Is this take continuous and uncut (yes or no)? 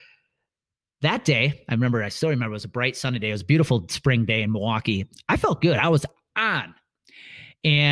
yes